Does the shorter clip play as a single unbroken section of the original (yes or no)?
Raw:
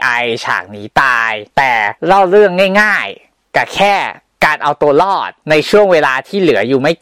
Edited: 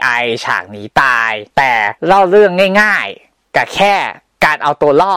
yes